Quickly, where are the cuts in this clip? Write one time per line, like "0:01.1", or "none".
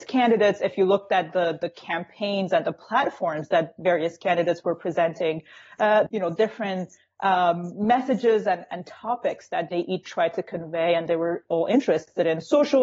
0:06.1
0:09.7